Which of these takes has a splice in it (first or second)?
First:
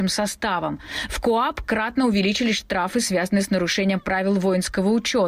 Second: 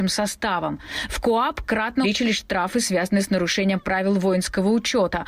second